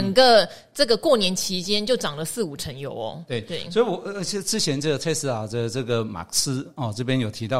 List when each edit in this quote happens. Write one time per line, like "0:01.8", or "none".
none